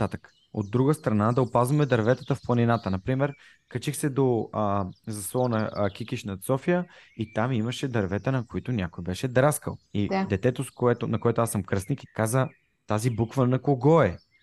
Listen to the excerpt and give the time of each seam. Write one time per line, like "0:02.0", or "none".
0:09.8
0:12.1